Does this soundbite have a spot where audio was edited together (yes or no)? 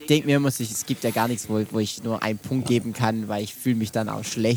no